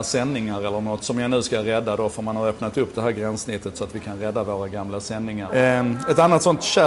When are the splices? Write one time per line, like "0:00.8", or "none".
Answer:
0:05.5